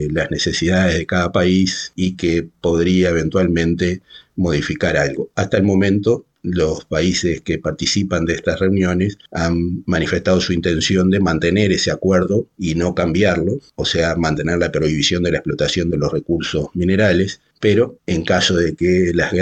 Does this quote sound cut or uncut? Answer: uncut